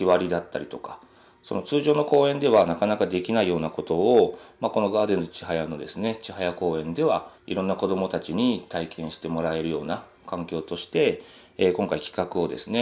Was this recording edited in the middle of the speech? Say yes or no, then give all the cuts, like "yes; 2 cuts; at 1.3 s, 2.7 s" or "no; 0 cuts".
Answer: yes; 1 cut; at 7.4 s